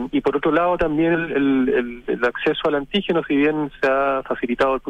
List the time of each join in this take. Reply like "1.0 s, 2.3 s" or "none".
none